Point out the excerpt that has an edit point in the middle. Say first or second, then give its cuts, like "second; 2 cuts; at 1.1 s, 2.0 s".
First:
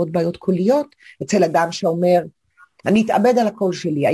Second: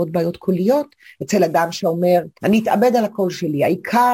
second; 1 cut; at 2.4 s